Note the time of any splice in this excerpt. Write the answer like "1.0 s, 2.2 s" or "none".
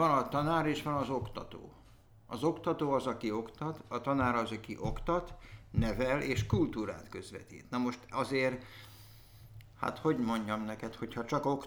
none

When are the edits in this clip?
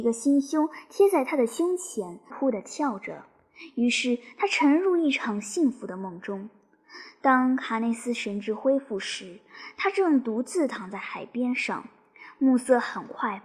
2.3 s

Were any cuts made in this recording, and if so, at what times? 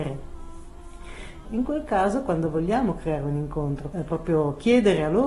1.4 s, 3.9 s

